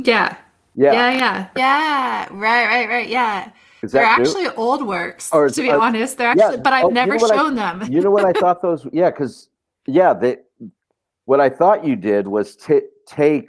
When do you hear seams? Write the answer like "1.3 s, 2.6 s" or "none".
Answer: 1.6 s